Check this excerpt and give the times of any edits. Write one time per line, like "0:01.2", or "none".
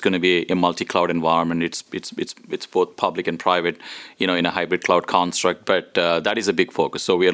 none